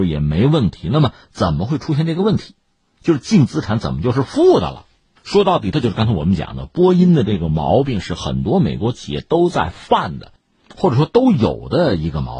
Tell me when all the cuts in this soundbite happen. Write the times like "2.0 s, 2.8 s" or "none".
5.7 s